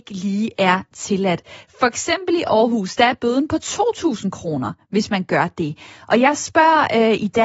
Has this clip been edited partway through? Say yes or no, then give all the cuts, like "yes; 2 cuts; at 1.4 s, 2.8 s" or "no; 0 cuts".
no; 0 cuts